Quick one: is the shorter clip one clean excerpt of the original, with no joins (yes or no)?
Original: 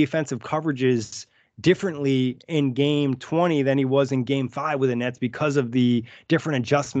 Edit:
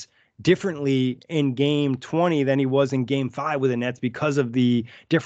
yes